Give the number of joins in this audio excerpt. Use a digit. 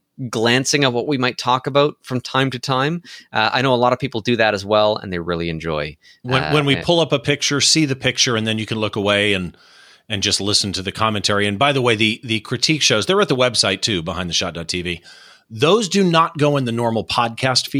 0